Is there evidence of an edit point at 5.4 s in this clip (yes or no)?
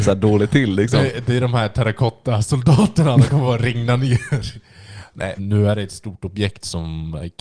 yes